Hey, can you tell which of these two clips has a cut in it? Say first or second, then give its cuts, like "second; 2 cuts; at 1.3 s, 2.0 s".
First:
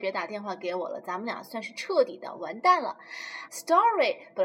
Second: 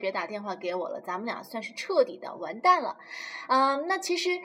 first; 1 cut; at 3.5 s